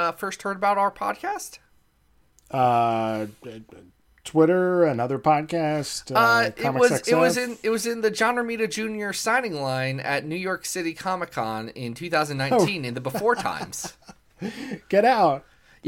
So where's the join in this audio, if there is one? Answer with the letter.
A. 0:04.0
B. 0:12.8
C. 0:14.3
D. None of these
D